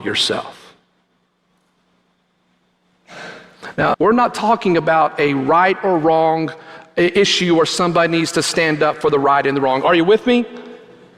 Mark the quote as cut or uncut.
cut